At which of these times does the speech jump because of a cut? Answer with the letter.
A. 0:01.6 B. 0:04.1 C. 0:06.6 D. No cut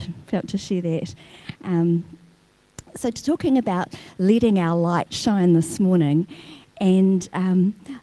D